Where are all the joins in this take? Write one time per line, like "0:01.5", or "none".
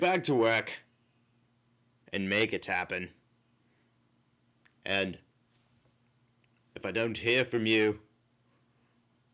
none